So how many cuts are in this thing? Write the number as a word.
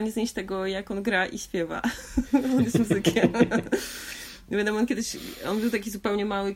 zero